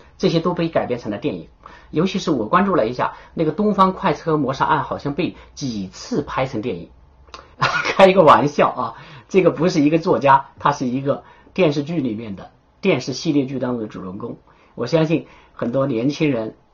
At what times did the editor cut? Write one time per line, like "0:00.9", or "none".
0:07.5